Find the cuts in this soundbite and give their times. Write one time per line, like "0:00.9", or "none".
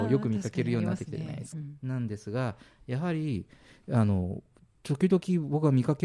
0:01.5